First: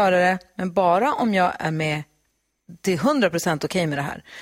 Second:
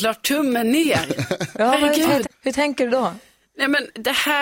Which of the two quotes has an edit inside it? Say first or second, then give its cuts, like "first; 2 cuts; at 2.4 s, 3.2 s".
second; 1 cut; at 2.2 s